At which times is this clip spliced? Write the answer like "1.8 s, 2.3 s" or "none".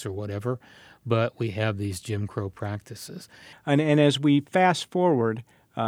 3.5 s